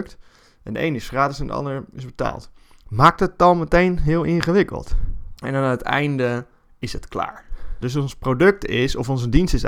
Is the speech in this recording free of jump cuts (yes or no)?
no